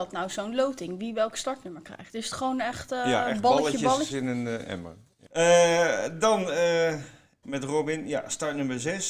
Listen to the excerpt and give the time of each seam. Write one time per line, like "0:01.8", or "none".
0:04.1
0:07.4